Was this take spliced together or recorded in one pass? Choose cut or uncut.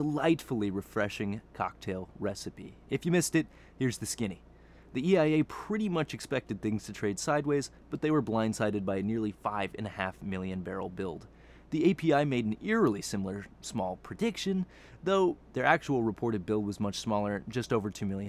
cut